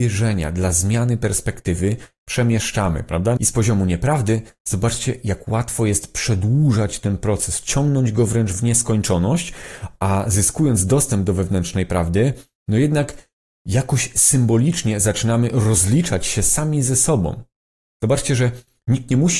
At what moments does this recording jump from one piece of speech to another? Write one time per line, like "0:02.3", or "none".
0:03.4